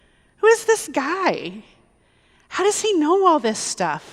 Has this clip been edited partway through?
no; 0 cuts

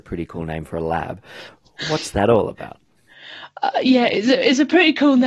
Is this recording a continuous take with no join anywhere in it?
yes; 0 cuts

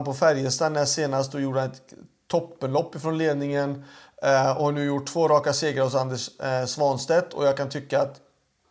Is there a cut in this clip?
no; 0 cuts

